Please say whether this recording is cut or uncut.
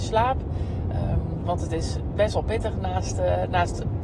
uncut